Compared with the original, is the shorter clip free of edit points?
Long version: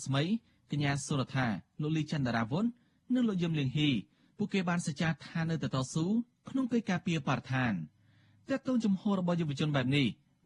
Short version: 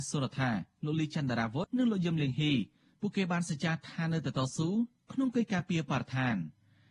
no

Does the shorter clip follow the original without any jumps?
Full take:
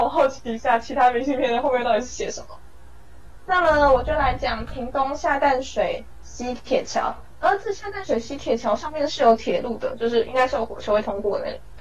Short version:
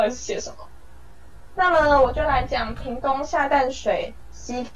yes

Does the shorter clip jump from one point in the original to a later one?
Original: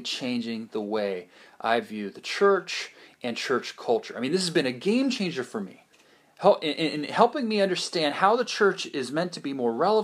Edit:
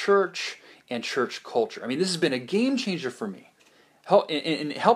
no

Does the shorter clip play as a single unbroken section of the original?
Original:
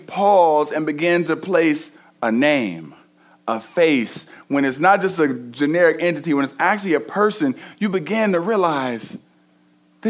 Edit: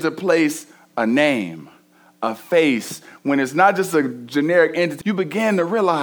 no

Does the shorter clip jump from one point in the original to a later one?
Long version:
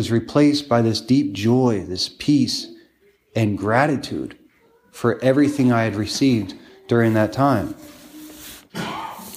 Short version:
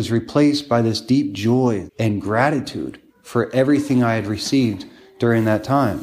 yes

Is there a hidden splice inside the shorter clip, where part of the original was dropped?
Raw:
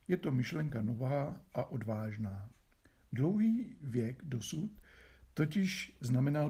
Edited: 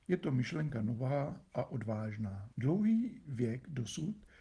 yes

